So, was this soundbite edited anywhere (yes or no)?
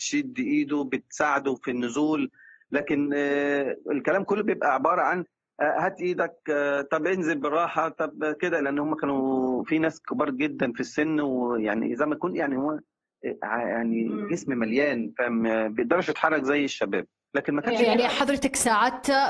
no